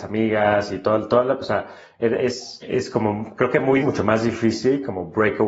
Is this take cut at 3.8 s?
yes; 2 cuts; at 2.6 s, 3.8 s

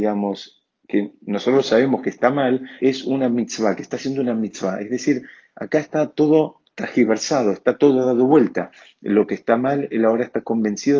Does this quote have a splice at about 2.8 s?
yes; 1 cut; at 2.8 s

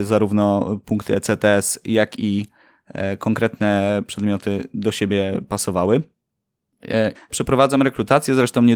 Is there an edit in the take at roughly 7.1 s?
yes; 1 cut; at 7.1 s

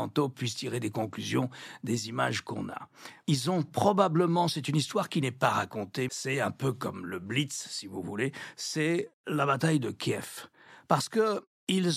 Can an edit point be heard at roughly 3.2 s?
yes; 2 cuts; at 3.2 s, 6.1 s

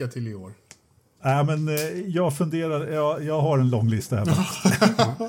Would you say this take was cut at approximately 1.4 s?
no; 0 cuts

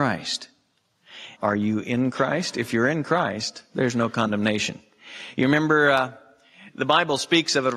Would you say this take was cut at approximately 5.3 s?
no; 1 cut; at 1.4 s

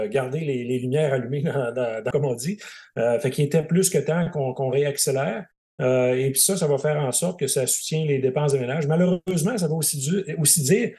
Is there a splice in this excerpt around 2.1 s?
yes; 1 cut; at 2.1 s

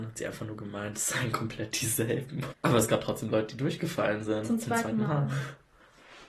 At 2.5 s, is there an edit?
yes; 1 cut; at 2.5 s

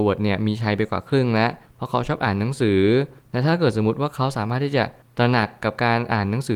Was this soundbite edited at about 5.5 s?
no; 0 cuts

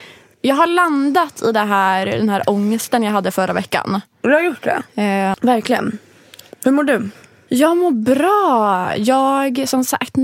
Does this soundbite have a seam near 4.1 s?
no; 1 cut; at 5.3 s

